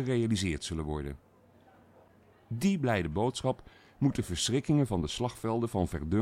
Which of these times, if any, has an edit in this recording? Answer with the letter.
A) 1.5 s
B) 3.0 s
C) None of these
C